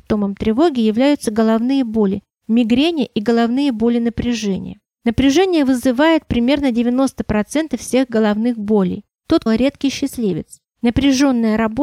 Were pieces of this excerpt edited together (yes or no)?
yes